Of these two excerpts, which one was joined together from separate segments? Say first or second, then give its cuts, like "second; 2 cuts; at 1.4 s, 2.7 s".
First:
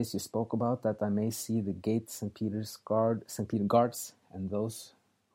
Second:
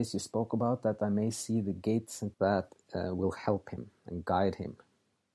second; 1 cut; at 2.3 s